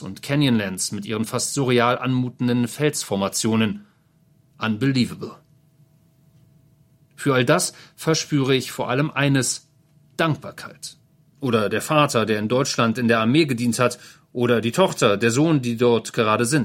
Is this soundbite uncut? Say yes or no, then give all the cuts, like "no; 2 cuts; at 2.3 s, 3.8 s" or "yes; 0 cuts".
no; 2 cuts; at 4.5 s, 11.3 s